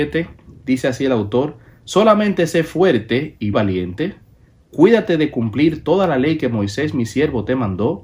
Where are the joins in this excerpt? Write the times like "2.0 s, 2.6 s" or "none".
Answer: 3.5 s